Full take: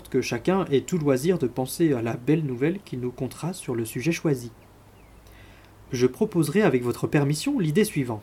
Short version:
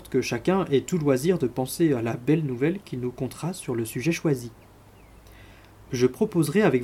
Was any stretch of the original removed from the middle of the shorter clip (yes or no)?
no